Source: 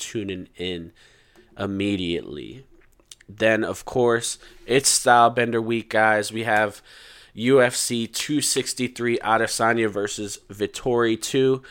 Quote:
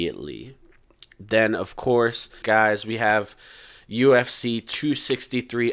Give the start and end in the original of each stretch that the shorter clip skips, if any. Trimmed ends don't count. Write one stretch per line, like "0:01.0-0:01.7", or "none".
0:04.5-0:05.9

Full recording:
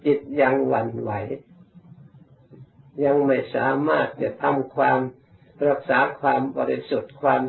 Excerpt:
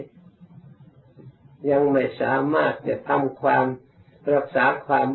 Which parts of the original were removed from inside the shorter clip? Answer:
none

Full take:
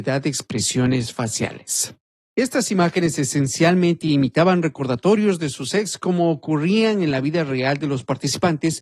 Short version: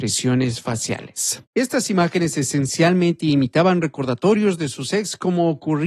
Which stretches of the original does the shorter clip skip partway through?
0:02.0-0:02.3

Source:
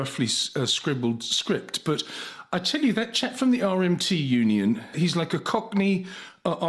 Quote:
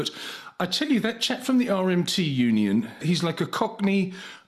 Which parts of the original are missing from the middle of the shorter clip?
none

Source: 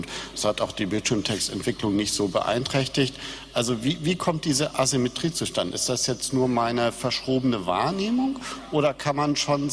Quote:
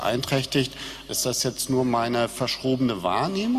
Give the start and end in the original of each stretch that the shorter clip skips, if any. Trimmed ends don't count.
0:03.5-0:05.7

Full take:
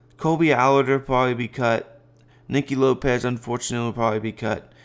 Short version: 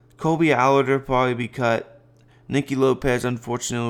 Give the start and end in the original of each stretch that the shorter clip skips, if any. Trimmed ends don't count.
none

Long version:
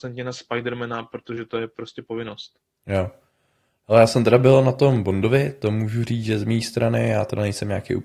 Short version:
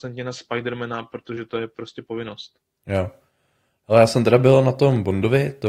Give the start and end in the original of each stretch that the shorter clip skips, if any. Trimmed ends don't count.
none

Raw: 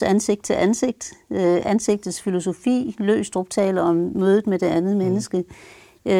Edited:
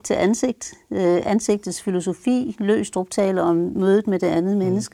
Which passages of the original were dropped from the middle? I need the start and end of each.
none

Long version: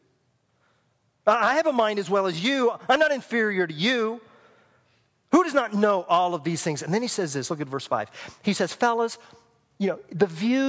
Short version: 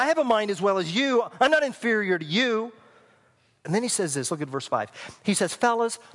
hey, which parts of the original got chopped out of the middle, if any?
0:05.1-0:06.8

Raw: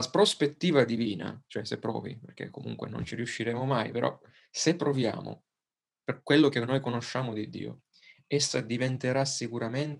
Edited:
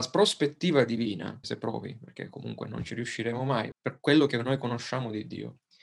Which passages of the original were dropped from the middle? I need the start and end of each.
0:01.4-0:01.6
0:03.9-0:05.9

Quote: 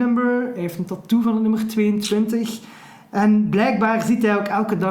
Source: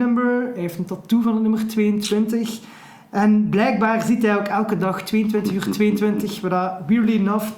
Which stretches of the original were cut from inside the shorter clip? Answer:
none

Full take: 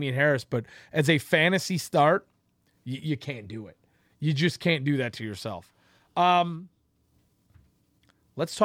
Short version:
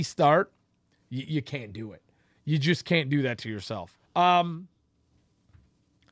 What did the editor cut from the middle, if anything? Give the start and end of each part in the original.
0:05.8-0:06.1

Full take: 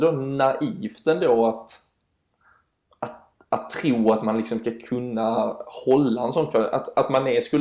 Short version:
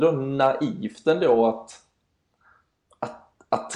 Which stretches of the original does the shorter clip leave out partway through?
none

